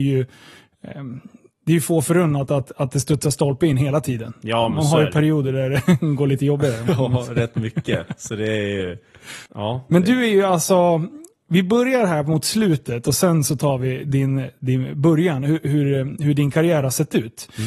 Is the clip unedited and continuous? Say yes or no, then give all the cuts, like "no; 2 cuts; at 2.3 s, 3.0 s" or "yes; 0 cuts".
no; 1 cut; at 9.5 s